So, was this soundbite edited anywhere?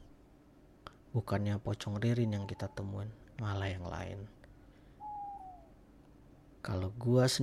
yes; 1 cut; at 3.4 s

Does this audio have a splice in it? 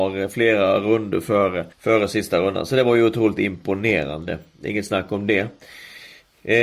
yes; 1 cut; at 1.7 s

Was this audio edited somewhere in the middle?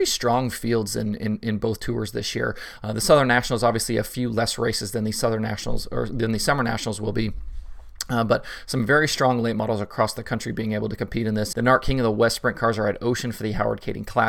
yes; 1 cut; at 11.5 s

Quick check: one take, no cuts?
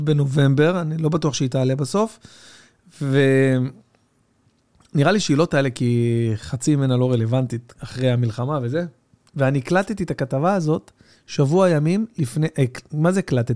no; 1 cut; at 7.7 s

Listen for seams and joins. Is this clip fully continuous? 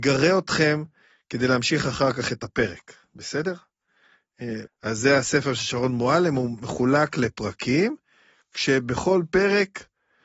no; 1 cut; at 4.7 s

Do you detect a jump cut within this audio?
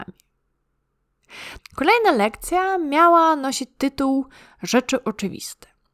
yes; 1 cut; at 1.6 s

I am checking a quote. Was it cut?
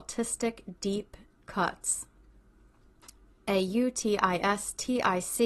no; 0 cuts

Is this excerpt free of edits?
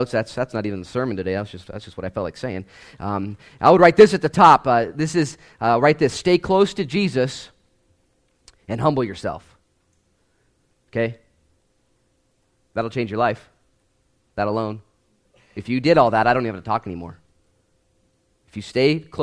yes; 0 cuts

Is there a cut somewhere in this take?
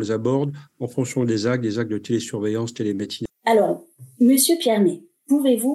yes; 1 cut; at 3.3 s

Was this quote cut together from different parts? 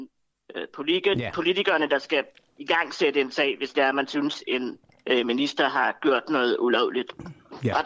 no; 0 cuts

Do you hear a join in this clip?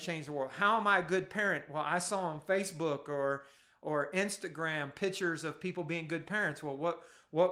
no; 0 cuts

